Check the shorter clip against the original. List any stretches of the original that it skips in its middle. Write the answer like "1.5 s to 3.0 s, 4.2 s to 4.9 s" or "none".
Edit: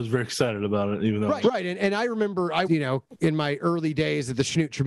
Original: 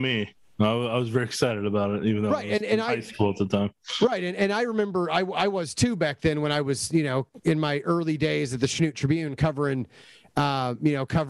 2.4 s to 4.0 s, 5.2 s to 6.9 s